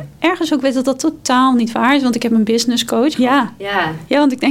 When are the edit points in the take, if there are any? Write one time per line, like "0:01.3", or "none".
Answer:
0:03.1

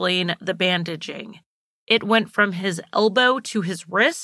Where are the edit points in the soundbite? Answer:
0:01.8

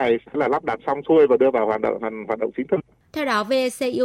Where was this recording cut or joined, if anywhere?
0:03.1

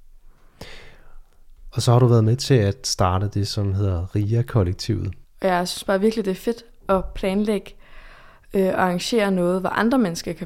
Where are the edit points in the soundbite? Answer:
0:05.2

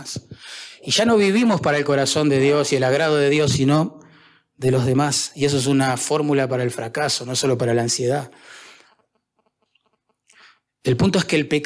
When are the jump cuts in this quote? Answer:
none

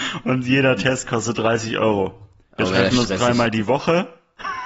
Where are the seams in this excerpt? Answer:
none

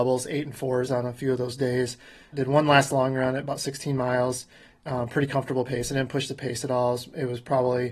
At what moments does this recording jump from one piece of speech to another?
0:02.3

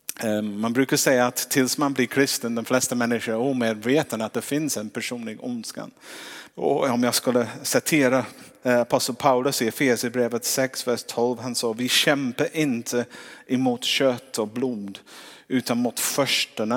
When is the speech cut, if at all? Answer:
0:06.5

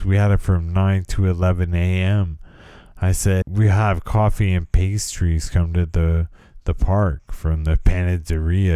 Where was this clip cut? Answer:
0:03.4

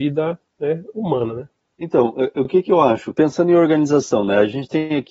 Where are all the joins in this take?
none

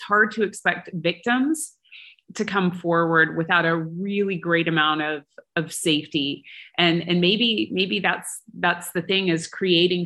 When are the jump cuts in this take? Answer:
none

